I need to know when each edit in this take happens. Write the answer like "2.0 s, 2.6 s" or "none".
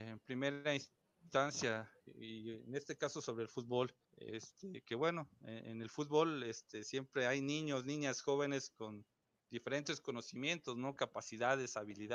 2.0 s, 4.0 s